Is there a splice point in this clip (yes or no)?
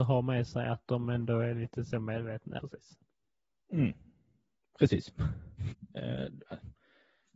yes